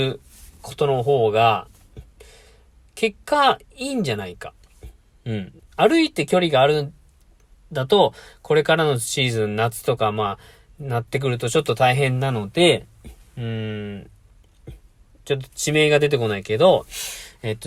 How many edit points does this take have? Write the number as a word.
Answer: one